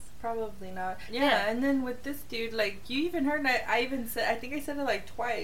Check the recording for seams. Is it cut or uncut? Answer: cut